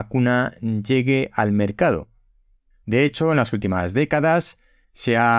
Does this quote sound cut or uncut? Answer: cut